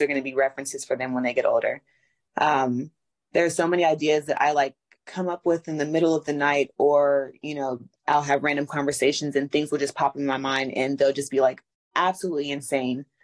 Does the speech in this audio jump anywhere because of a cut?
no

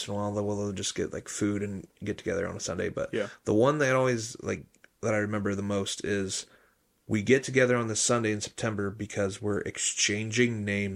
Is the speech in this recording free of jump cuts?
yes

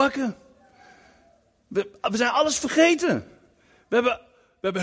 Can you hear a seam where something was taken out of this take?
no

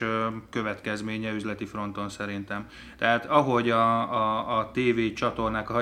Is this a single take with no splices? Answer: yes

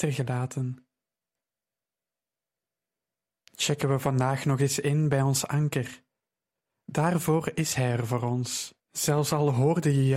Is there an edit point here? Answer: yes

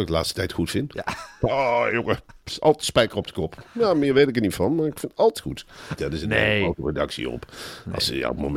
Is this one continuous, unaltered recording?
no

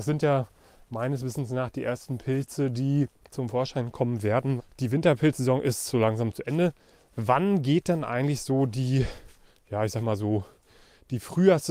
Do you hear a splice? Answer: yes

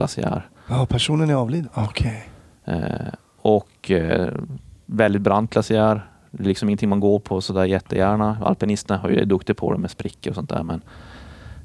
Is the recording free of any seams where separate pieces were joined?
no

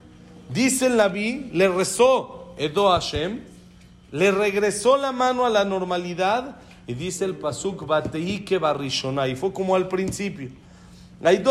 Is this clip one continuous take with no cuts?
yes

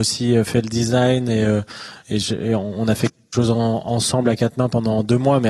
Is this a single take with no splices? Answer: yes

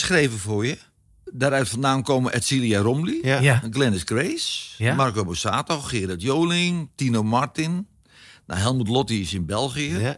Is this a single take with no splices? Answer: yes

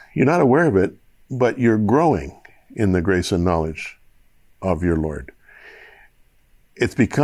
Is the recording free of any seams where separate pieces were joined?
yes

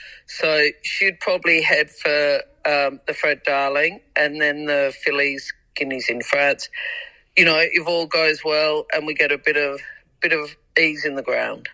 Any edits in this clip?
no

